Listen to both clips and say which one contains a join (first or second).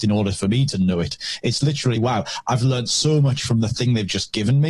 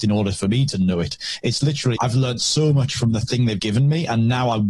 second